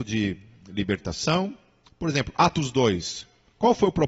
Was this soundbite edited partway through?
no; 0 cuts

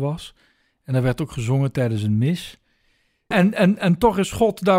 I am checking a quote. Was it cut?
yes; 1 cut; at 3.3 s

